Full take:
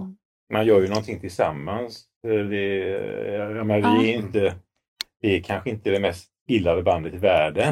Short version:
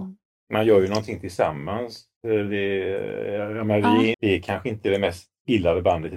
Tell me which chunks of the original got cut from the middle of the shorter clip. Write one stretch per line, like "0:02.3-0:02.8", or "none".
0:04.1-0:05.1